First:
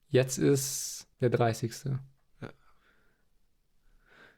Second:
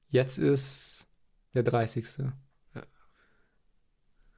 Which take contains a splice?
first; 1 cut; at 1.1 s

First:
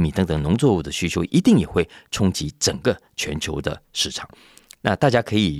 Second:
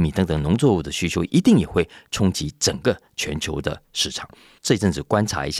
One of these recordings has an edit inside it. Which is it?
second; 1 cut; at 4.6 s

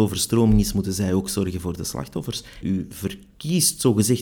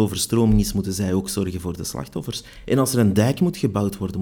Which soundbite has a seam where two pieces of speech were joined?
first; 1 cut; at 2.6 s

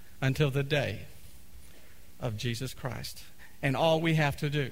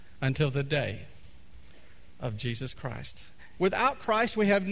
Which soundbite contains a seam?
second; 1 cut; at 3.6 s

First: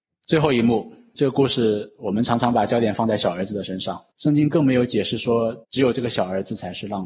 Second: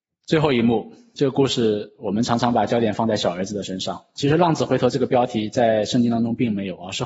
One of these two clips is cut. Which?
first; 2 cuts; at 4.1 s, 5.6 s

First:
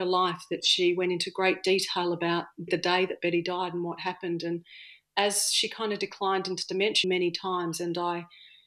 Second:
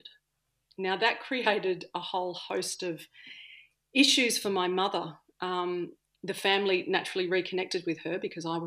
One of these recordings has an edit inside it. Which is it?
first; 2 cuts; at 2.7 s, 7.0 s

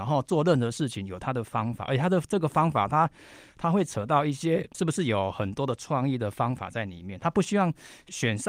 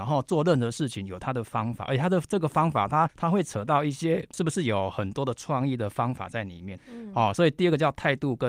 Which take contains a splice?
second; 2 cuts; at 3.1 s, 6.8 s

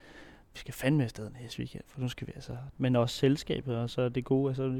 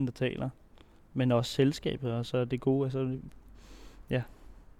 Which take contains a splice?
first; 1 cut; at 2.7 s

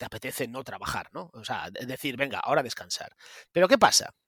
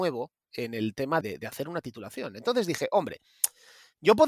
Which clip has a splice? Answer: second; 1 cut; at 1.2 s

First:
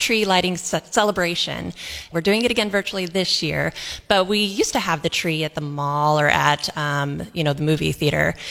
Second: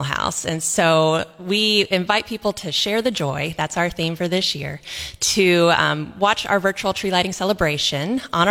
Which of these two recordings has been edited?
first; 1 cut; at 2.1 s

